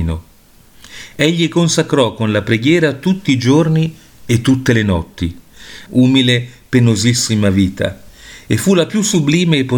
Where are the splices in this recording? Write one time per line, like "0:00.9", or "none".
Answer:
0:05.9